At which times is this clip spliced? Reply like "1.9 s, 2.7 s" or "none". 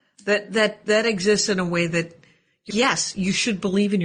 2.7 s

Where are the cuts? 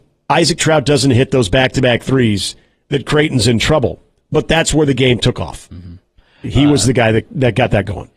none

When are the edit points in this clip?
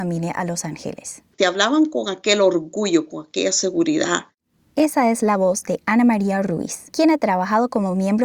1.3 s

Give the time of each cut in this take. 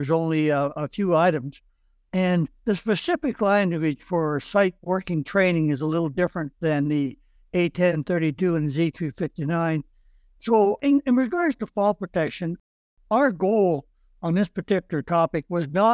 10.3 s

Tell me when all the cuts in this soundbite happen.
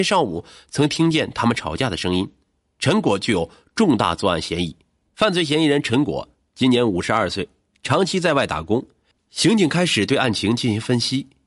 5.1 s, 9.1 s

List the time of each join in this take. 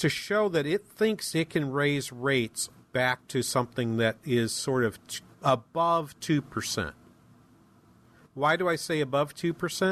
none

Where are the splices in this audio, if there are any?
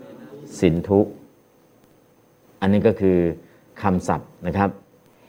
none

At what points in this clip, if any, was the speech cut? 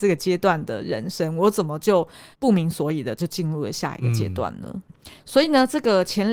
2.3 s, 4.9 s

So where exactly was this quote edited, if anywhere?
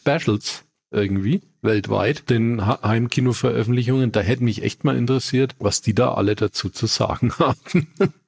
none

